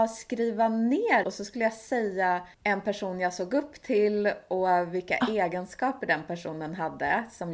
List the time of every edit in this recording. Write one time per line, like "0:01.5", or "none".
0:01.2
0:02.5